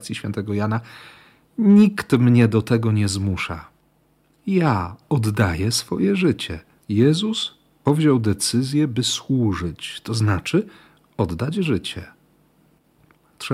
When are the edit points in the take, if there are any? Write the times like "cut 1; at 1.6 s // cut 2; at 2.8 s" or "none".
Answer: cut 1; at 6.8 s